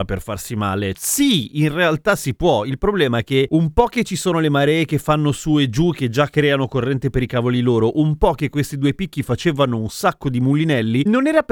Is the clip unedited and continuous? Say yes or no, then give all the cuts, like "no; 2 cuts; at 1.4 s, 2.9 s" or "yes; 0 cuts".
no; 1 cut; at 0.9 s